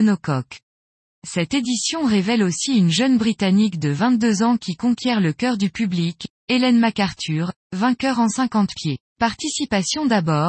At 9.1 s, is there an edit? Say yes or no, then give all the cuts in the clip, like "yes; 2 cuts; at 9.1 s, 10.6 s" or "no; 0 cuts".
yes; 1 cut; at 9.1 s